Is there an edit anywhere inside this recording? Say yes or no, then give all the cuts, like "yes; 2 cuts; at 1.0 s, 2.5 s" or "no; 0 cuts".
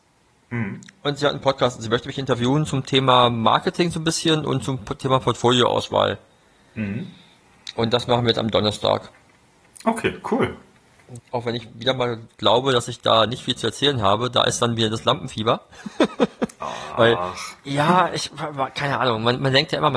yes; 1 cut; at 11.2 s